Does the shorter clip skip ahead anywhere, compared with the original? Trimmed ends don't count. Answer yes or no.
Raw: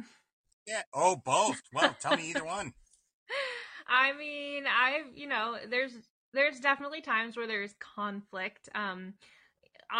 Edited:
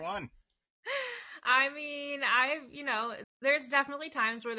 yes